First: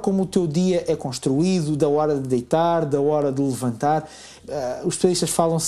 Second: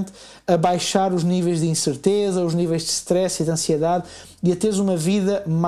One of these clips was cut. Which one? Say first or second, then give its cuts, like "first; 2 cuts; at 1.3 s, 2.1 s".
first; 1 cut; at 4.4 s